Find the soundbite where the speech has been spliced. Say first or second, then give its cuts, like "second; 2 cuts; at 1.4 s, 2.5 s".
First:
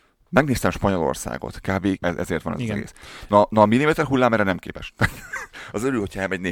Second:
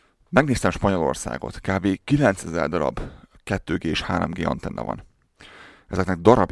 first; 1 cut; at 2.0 s